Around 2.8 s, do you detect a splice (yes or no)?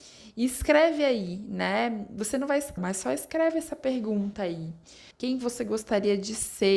yes